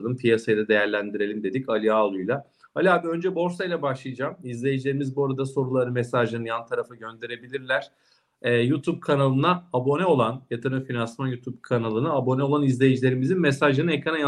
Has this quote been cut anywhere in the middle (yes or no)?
no